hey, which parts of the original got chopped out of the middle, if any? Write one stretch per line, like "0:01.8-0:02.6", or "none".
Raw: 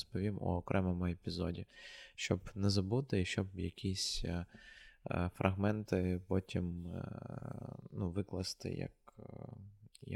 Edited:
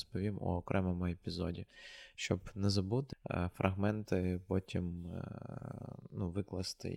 0:03.1-0:04.9

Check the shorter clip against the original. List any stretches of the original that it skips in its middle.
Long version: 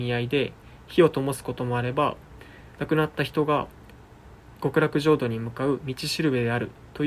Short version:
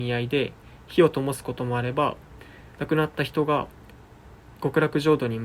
none

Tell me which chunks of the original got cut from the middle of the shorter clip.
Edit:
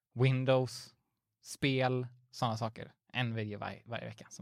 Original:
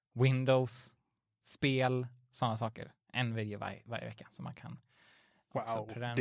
none

